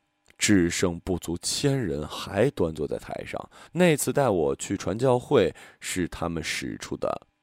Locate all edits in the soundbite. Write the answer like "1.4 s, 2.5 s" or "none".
3.7 s

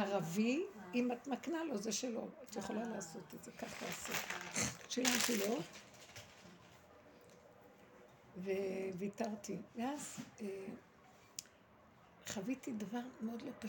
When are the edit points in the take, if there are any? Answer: 9.7 s

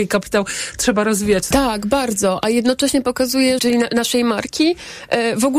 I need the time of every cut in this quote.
1.5 s, 3.6 s

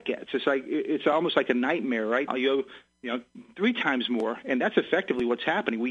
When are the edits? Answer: 2.3 s

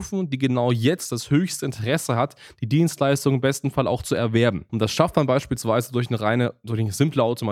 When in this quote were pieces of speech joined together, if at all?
4.7 s

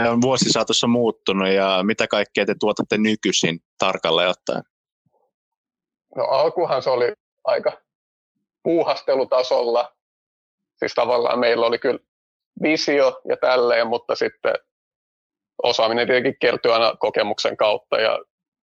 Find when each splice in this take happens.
7.3 s

